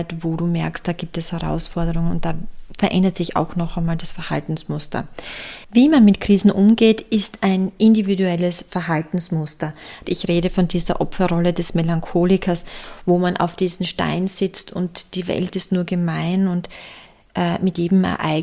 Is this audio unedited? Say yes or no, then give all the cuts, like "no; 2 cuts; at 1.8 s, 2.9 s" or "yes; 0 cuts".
no; 1 cut; at 10.0 s